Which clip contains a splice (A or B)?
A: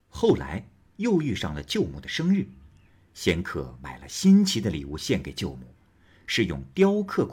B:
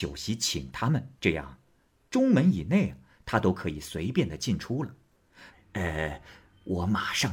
B